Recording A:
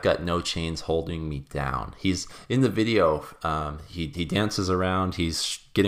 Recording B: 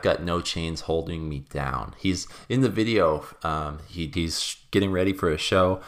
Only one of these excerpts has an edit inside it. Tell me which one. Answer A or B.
B